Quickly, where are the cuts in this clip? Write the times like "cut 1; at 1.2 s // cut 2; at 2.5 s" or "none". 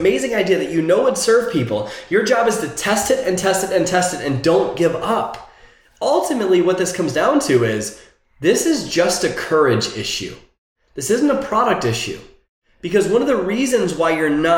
none